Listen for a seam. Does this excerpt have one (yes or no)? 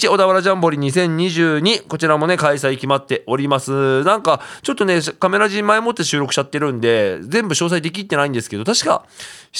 no